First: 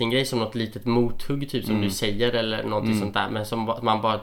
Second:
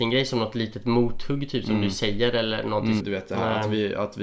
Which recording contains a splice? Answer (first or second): second